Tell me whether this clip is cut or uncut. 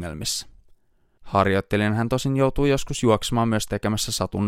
cut